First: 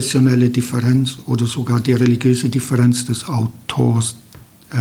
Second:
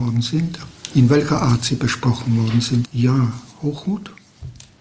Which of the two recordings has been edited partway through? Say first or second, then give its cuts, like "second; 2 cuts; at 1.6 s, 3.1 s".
second; 1 cut; at 2.8 s